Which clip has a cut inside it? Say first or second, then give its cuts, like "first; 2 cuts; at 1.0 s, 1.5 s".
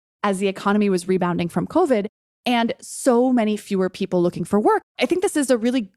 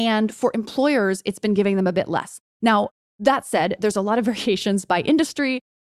first; 1 cut; at 4.8 s